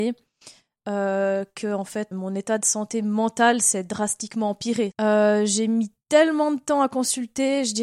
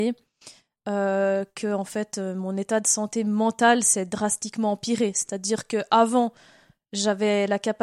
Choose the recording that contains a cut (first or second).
first